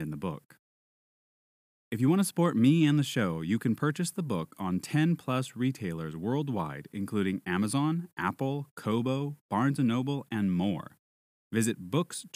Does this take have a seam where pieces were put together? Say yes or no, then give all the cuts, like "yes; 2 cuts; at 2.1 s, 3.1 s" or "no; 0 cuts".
no; 0 cuts